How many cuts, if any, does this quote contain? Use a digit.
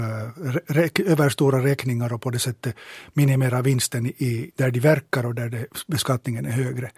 1